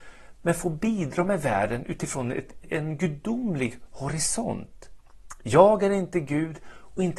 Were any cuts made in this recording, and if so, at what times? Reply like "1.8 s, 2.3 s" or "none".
2.6 s